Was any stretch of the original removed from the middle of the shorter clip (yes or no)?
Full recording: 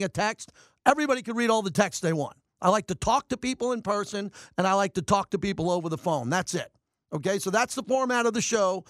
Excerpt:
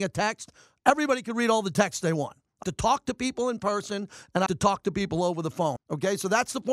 yes